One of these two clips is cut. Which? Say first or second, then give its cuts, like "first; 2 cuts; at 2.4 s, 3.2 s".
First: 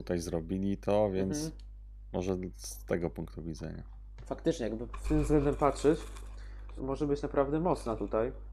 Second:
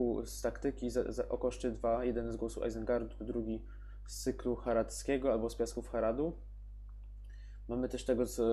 first; 2 cuts; at 5.0 s, 6.8 s